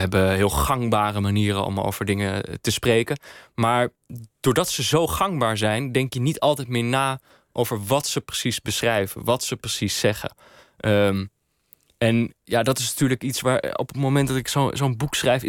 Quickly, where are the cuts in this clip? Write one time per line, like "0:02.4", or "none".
none